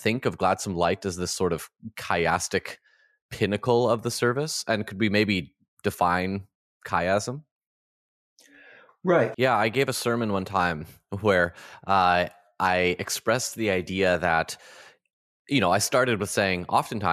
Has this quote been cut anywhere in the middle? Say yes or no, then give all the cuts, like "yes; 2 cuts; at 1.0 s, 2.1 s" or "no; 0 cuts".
yes; 1 cut; at 9.3 s